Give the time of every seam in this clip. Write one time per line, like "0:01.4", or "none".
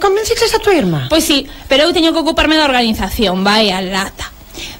none